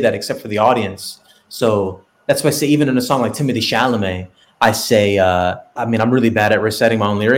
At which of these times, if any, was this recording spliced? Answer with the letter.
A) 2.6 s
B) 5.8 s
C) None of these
B